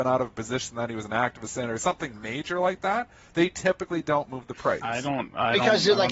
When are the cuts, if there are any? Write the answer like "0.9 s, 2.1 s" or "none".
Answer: 4.8 s

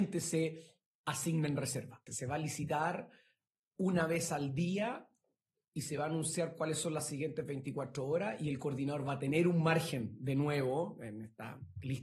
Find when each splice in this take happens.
2.1 s

